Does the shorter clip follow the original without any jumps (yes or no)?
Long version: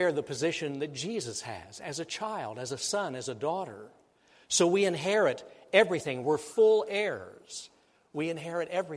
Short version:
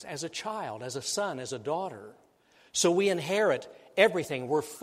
yes